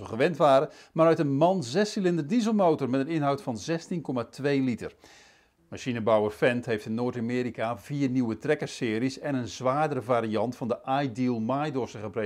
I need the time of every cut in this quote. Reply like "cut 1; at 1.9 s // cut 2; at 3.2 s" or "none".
cut 1; at 5.6 s